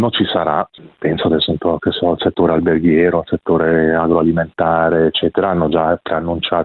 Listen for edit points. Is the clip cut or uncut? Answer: uncut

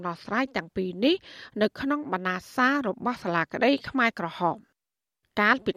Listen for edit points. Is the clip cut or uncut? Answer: uncut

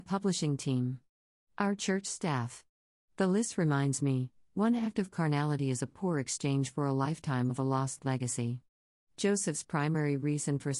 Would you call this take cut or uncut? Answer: uncut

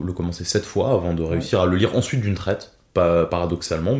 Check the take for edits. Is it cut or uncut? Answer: uncut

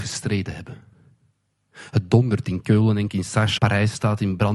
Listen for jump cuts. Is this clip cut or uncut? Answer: cut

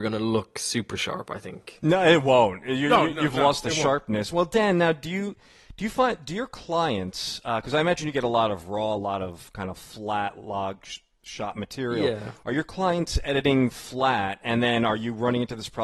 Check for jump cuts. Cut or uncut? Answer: uncut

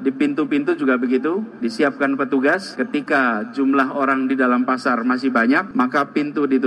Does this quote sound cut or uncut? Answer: uncut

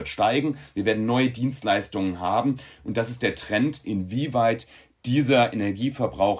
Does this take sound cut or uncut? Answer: cut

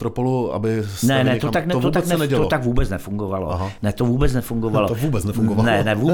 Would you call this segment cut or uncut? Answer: uncut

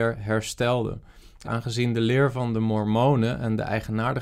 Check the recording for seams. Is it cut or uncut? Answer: cut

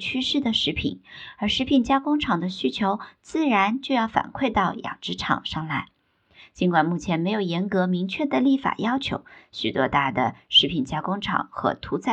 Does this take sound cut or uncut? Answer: uncut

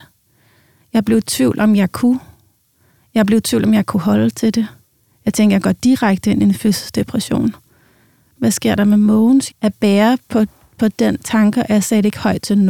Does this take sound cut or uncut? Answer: cut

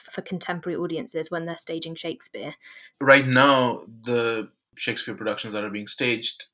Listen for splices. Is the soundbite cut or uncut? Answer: cut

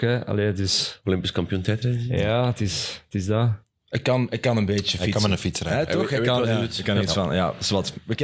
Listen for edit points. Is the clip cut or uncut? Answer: uncut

